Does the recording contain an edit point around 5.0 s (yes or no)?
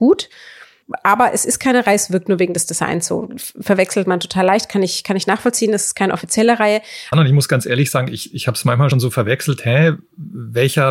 no